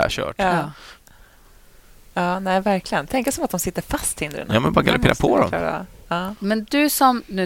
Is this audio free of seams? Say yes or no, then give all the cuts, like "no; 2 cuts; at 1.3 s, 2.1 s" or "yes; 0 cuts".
yes; 0 cuts